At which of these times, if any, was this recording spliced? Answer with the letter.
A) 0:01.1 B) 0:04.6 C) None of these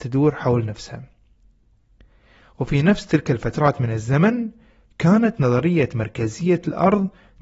C